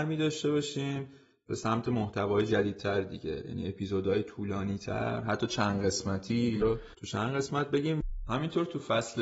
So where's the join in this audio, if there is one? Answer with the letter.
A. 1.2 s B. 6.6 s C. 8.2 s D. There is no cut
B